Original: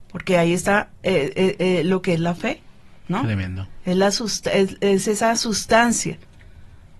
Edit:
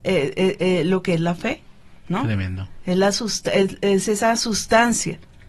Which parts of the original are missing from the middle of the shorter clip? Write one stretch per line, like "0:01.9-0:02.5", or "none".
none